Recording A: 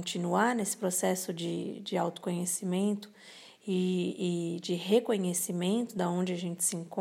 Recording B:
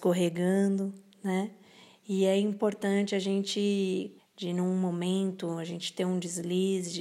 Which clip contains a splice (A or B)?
B